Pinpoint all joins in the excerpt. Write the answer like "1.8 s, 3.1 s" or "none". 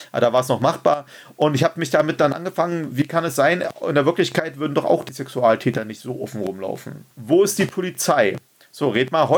7.1 s